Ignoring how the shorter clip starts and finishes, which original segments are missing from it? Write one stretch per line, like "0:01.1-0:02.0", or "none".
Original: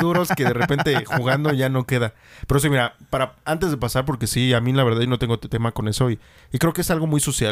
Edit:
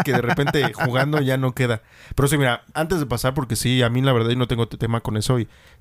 0:03.0-0:03.4